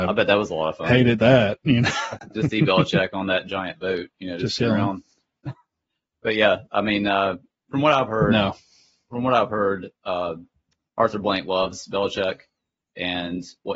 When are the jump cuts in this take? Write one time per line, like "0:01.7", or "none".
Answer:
0:04.6